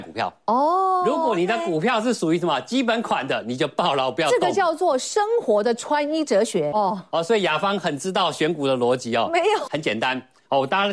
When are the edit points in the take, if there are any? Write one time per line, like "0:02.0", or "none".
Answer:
0:06.7
0:09.7